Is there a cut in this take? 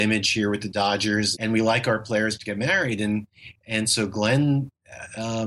yes; 1 cut; at 1.3 s

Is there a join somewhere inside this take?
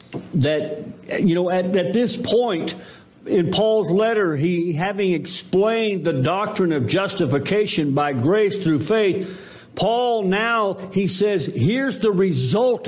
no; 0 cuts

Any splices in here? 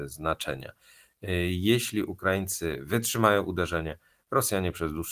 no; 0 cuts

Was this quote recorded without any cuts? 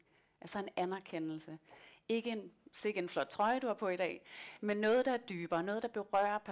yes; 0 cuts

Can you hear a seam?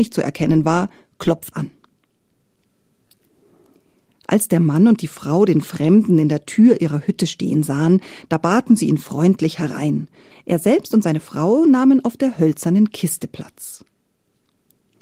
yes; 2 cuts; at 1.5 s, 10.3 s

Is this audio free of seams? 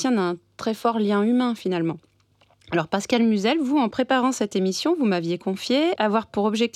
yes; 0 cuts

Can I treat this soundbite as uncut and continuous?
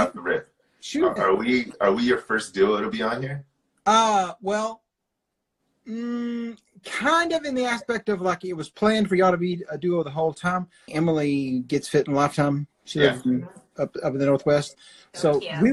no; 3 cuts; at 1.2 s, 10.9 s, 14.8 s

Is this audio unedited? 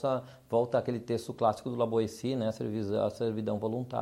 yes; 0 cuts

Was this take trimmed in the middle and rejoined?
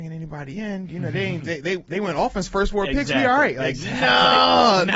no; 0 cuts

